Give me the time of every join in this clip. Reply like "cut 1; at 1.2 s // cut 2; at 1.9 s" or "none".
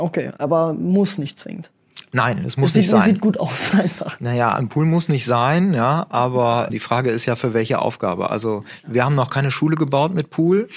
cut 1; at 6.7 s